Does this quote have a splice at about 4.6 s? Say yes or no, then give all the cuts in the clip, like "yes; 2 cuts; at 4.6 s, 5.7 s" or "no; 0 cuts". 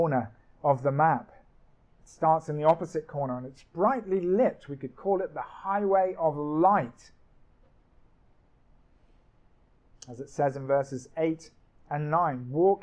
no; 1 cut; at 1.8 s